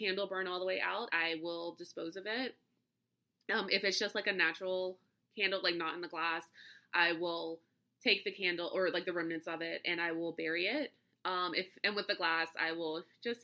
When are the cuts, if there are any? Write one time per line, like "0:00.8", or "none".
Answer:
0:01.1